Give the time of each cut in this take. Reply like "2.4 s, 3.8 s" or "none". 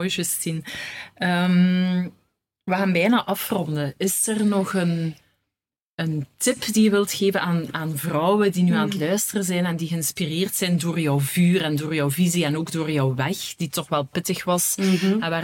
none